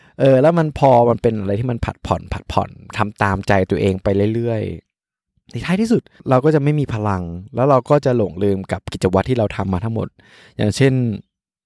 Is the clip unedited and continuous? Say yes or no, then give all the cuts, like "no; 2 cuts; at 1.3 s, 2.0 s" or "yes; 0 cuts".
no; 1 cut; at 4.8 s